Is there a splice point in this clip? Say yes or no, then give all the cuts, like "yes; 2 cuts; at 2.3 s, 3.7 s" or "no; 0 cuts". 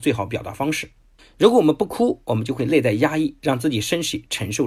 no; 0 cuts